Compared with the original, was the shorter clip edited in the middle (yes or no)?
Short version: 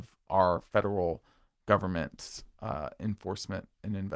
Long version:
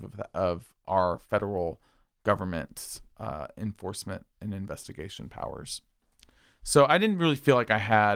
no